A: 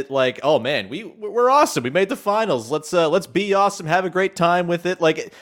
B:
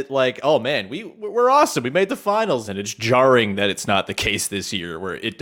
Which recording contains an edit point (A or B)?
B